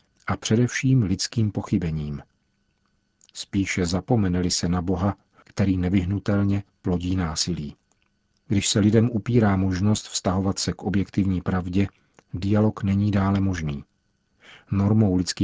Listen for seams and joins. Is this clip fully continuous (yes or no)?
no